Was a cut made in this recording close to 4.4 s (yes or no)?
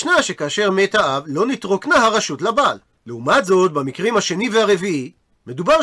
no